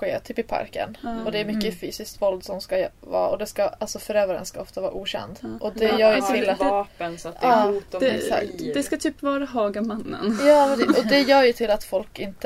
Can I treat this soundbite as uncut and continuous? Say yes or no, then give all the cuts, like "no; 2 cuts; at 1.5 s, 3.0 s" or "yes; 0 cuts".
yes; 0 cuts